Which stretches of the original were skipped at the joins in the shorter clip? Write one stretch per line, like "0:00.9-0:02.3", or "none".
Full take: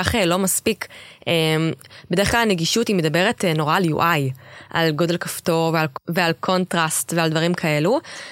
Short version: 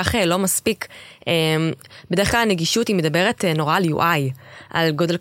none